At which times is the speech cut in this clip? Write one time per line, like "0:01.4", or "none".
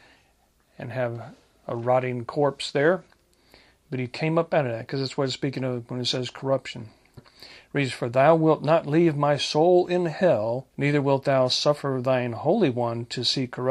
0:07.2
0:10.7